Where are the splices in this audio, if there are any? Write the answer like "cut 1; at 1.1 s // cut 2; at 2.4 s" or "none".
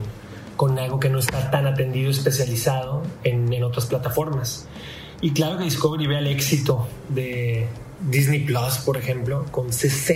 none